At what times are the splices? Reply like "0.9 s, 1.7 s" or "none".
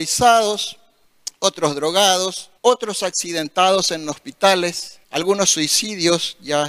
2.6 s, 5.0 s